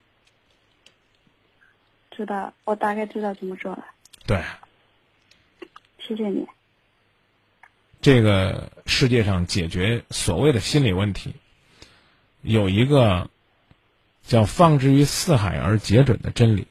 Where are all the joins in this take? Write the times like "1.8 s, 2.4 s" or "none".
none